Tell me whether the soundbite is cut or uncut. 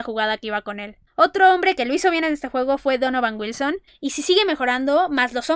cut